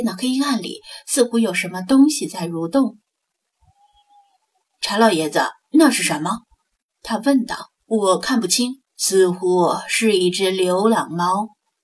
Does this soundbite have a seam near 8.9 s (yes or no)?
yes